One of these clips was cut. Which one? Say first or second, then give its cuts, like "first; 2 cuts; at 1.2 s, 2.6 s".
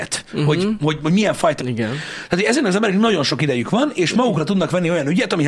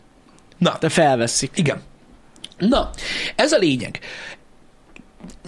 first; 1 cut; at 1.6 s